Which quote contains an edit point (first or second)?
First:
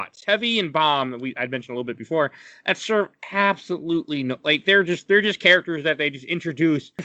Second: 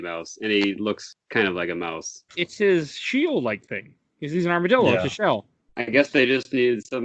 second